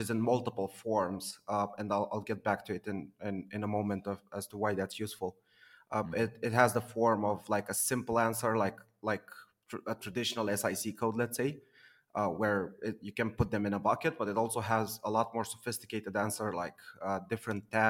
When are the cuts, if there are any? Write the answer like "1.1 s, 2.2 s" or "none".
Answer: none